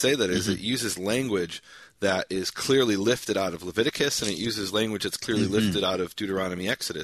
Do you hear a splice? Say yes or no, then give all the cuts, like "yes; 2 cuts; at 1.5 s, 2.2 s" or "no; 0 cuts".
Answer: no; 0 cuts